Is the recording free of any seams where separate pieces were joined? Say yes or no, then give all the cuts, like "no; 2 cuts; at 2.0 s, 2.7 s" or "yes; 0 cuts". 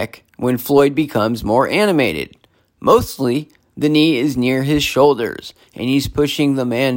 yes; 0 cuts